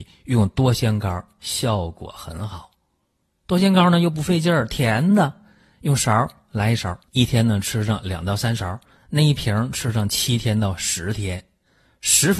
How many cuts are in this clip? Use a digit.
1